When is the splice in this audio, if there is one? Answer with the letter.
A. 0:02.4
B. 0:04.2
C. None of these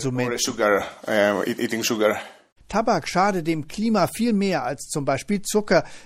C